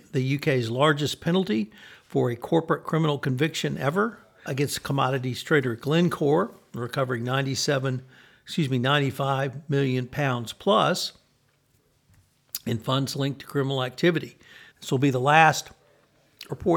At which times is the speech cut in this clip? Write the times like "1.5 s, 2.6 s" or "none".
4.5 s, 14.7 s